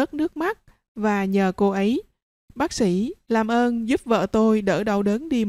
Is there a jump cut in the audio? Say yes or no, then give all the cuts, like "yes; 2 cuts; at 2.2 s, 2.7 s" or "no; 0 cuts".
no; 0 cuts